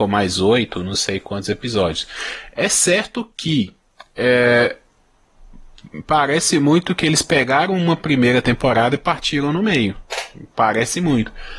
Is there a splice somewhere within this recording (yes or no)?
no